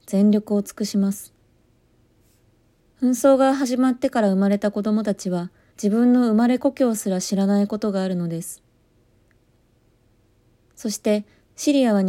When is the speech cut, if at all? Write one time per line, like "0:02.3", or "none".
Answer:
0:02.8
0:05.7